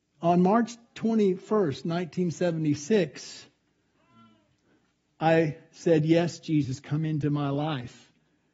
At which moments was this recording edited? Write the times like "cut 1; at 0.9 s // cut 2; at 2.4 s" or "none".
none